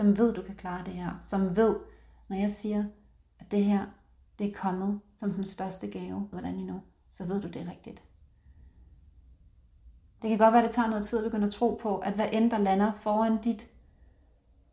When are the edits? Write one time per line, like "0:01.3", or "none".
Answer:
0:06.3
0:10.2